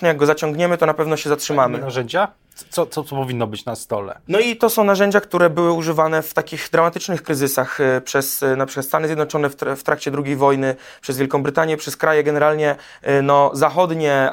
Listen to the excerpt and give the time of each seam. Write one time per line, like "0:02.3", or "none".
none